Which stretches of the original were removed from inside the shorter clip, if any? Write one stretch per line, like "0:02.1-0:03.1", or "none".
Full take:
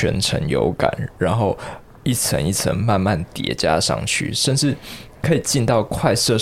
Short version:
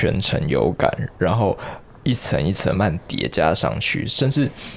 0:02.7-0:03.0